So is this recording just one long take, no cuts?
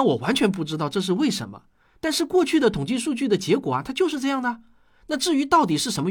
yes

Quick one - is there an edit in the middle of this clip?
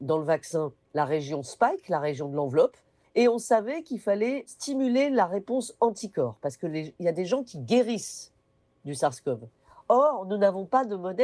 yes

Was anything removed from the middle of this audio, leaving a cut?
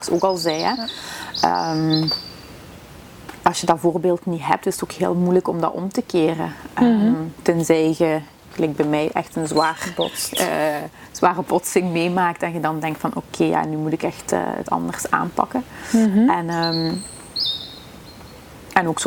no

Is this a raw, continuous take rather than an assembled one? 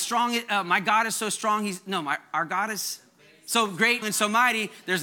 no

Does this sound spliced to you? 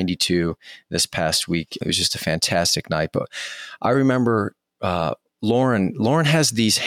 yes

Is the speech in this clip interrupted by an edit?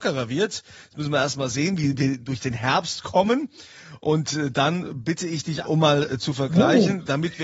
yes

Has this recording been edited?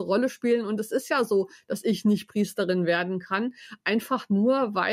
no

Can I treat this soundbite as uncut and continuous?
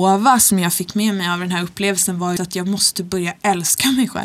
no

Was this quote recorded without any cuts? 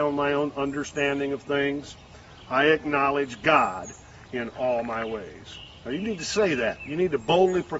yes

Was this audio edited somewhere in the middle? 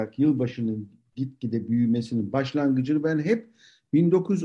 no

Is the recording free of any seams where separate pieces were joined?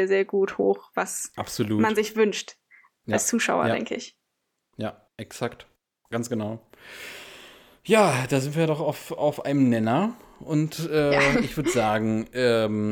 yes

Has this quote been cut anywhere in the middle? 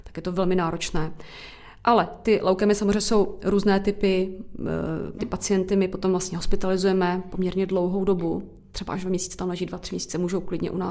yes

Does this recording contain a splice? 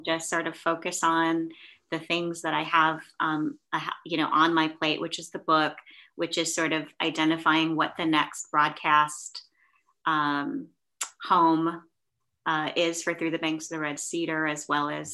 no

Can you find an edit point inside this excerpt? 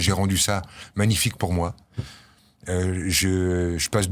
no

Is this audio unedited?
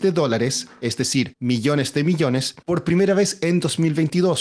yes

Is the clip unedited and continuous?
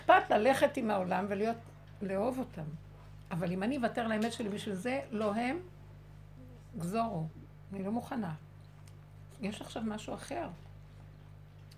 yes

